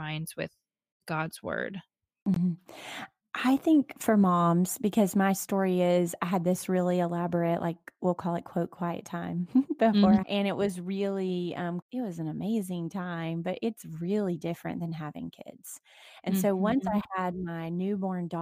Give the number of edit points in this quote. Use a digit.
2